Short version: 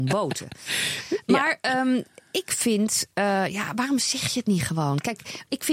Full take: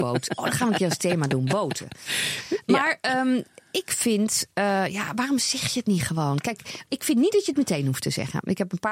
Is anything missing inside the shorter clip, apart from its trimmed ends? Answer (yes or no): no